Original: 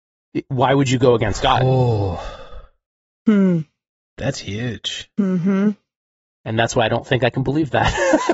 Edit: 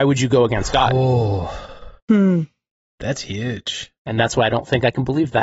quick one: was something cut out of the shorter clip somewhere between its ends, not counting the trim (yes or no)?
yes